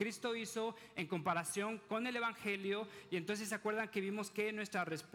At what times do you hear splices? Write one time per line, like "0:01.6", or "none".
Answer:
none